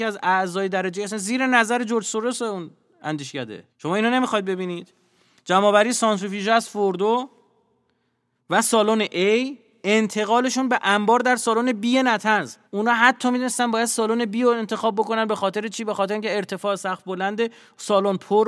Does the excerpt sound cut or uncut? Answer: cut